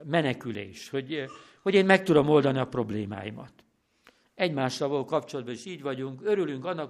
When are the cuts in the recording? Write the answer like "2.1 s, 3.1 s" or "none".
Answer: none